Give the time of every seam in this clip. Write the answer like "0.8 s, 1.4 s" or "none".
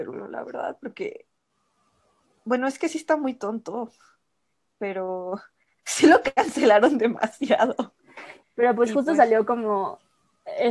8.4 s